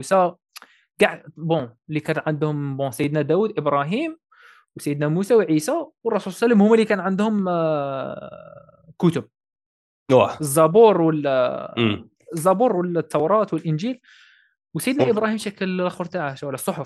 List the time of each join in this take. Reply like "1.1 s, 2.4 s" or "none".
none